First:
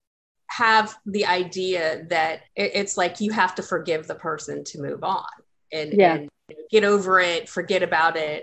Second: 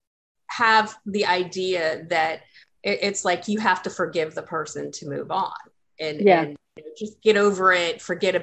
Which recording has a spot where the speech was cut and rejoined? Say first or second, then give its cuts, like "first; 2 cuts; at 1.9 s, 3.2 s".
first; 2 cuts; at 2.5 s, 6.7 s